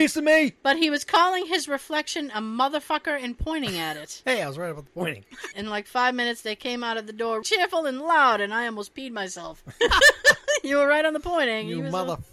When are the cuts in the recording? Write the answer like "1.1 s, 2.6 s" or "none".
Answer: 5.5 s, 7.4 s, 9.8 s